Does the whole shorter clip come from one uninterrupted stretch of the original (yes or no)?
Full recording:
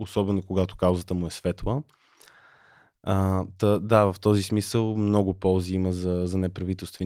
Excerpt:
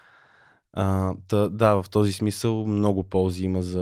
yes